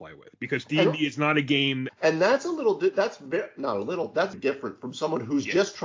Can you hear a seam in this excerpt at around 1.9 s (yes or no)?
yes